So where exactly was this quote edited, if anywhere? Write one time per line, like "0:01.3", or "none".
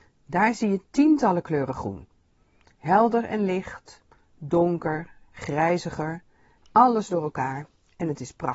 0:06.6